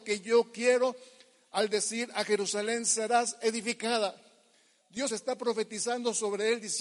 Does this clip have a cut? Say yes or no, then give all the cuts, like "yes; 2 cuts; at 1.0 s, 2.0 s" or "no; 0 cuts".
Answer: yes; 1 cut; at 5.1 s